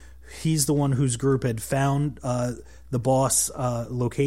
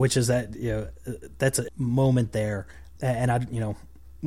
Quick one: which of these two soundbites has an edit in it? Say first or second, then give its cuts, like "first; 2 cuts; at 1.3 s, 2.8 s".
second; 2 cuts; at 1.7 s, 3.0 s